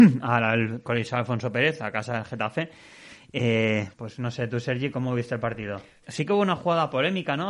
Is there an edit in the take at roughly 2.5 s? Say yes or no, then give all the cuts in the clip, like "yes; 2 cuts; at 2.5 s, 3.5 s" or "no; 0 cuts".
no; 2 cuts; at 3.9 s, 6.0 s